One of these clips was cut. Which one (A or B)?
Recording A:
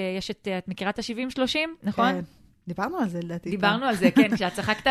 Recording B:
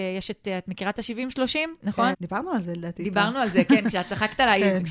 B